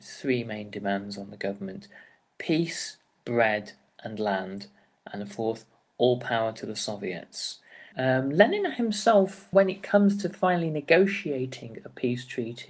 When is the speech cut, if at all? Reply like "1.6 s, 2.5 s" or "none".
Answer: 7.9 s, 9.5 s